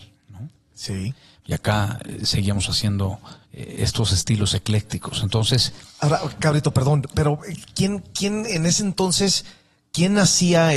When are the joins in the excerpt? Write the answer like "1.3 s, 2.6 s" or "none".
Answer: 1.4 s, 3.4 s